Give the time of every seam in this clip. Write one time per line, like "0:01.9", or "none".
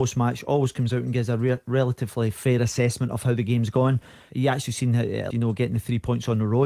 0:04.3
0:05.3